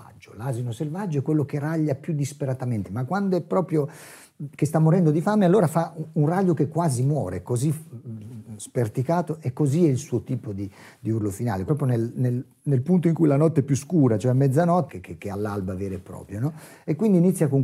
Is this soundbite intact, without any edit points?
no; 3 cuts; at 2.8 s, 11.7 s, 14.9 s

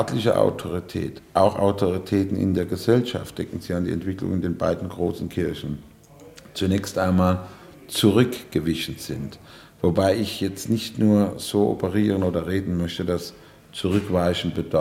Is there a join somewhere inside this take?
no; 0 cuts

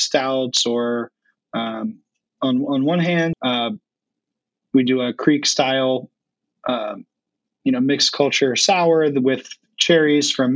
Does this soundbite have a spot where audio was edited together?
yes; 1 cut; at 3.3 s

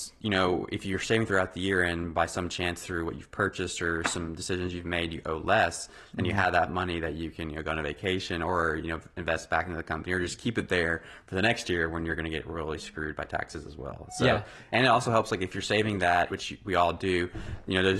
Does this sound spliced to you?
yes; 2 cuts; at 14.7 s, 16.3 s

